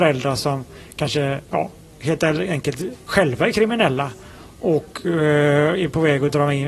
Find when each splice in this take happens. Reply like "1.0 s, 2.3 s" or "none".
1.5 s, 3.1 s